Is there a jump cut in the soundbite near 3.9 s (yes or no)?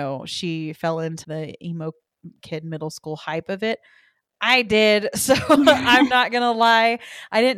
no